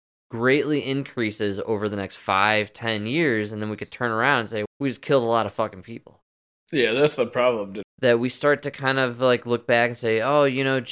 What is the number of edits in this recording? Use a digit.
2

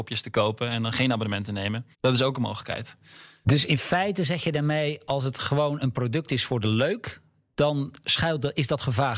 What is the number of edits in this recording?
1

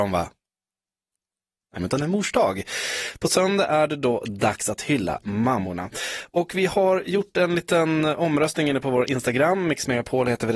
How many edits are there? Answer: 1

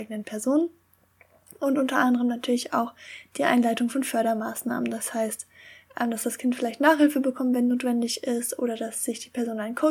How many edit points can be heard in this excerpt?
0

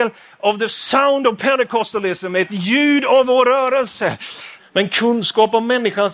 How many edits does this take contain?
1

